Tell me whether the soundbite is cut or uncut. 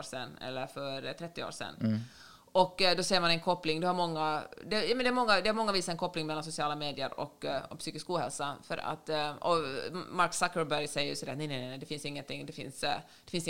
uncut